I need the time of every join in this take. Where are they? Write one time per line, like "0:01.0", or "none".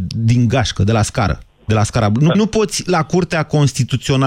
0:02.3